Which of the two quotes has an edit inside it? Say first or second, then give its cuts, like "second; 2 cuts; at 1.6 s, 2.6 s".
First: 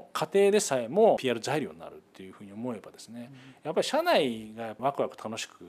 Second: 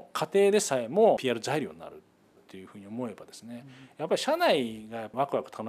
first; 1 cut; at 2.1 s